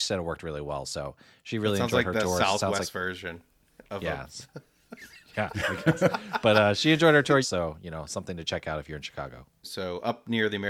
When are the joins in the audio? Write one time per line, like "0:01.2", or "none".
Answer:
0:07.4
0:09.6